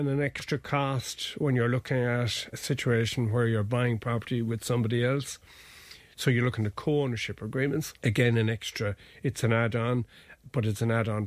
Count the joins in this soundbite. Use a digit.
2